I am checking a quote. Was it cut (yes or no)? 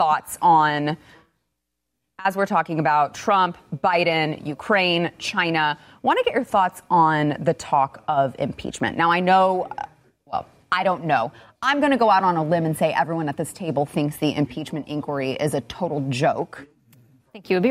no